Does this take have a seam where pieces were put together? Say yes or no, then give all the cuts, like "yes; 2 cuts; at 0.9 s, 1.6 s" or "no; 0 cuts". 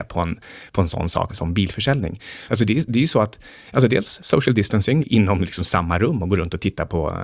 yes; 3 cuts; at 1.3 s, 2.5 s, 5.0 s